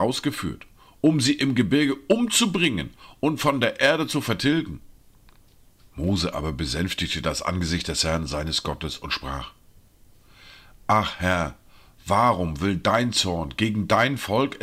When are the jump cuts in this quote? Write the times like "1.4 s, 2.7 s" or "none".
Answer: 5.8 s